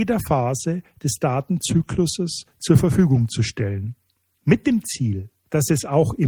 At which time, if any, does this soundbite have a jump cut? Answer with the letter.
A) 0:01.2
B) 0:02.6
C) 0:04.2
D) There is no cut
D